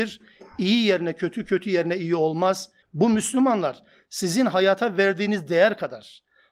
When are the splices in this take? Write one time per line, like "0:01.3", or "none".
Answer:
0:02.8

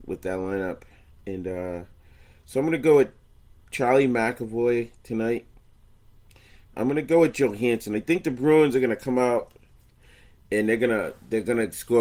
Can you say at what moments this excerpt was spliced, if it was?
0:06.7

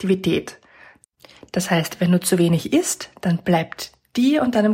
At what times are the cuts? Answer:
none

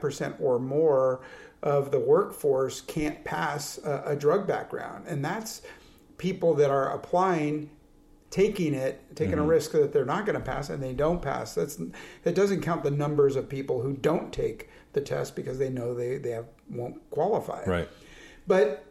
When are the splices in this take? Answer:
none

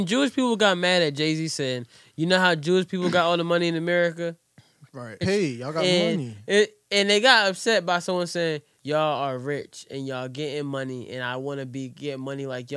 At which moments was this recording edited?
0:05.2
0:08.8

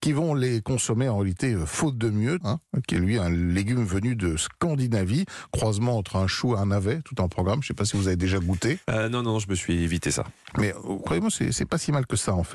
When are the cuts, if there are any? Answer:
0:02.4

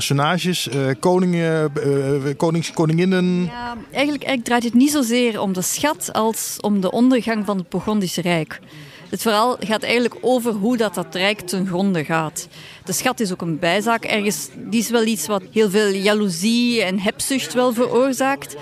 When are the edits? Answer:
0:15.5

